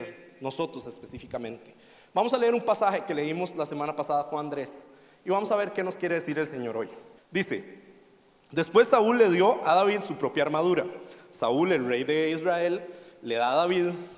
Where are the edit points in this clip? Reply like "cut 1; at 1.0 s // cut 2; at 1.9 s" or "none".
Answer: cut 1; at 7.2 s